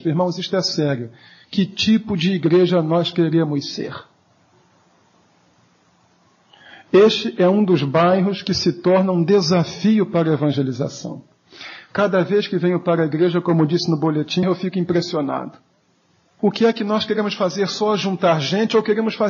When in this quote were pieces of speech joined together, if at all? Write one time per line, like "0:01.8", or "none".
0:14.4
0:16.4